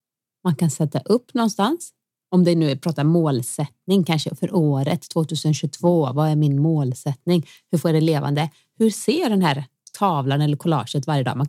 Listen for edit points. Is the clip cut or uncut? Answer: uncut